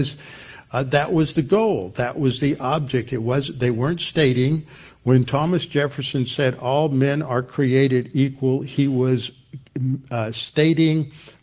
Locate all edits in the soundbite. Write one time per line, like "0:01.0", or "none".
none